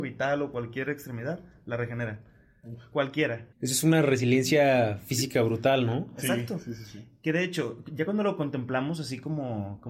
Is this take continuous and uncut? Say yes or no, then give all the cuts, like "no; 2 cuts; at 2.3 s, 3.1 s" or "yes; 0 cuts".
no; 1 cut; at 3.5 s